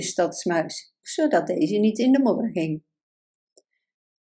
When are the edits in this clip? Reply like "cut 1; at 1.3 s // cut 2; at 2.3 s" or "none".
cut 1; at 1.0 s